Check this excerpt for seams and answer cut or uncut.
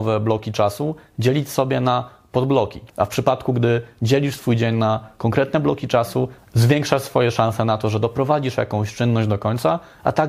cut